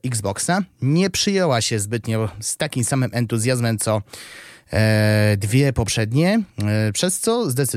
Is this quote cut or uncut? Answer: uncut